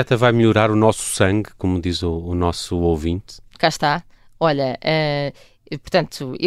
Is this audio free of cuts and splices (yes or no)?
yes